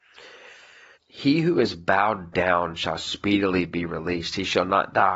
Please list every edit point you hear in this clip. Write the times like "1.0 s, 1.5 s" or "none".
1.0 s